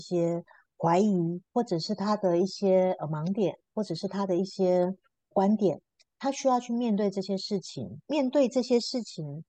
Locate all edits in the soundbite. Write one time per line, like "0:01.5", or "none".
none